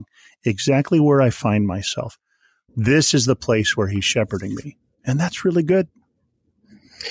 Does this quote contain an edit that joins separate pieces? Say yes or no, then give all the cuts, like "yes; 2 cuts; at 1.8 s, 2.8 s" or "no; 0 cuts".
no; 0 cuts